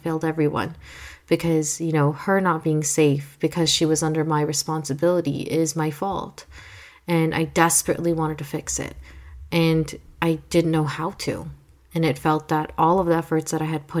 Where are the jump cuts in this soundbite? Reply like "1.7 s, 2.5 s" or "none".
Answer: none